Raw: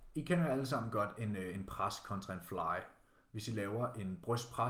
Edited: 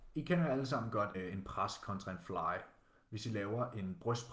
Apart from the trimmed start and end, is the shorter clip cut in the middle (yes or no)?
yes